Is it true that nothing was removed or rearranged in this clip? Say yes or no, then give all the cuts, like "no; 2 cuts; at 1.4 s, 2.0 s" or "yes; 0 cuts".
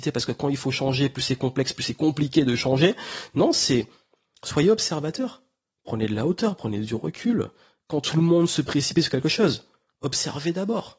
yes; 0 cuts